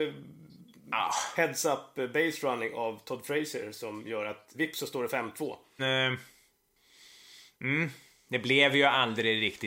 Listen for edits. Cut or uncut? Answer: cut